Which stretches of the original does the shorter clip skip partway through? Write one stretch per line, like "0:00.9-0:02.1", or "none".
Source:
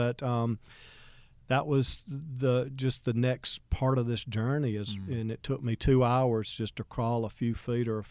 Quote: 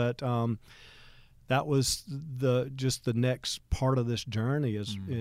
none